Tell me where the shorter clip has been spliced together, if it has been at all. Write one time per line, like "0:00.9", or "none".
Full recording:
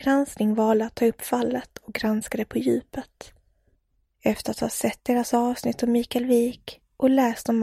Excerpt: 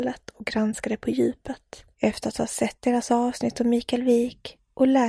0:01.9